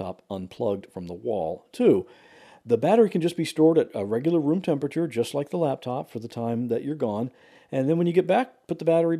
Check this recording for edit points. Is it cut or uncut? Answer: uncut